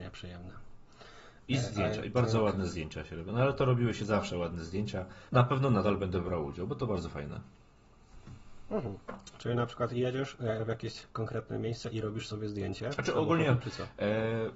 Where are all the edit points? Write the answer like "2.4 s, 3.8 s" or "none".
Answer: 5.3 s

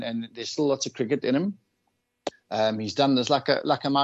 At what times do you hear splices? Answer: 2.3 s

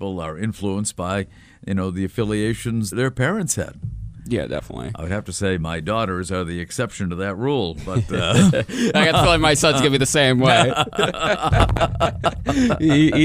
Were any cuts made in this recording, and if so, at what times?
2.9 s

